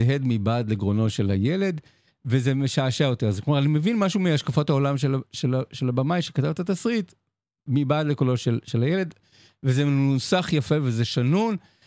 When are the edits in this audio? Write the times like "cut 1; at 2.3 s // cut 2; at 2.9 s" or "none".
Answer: none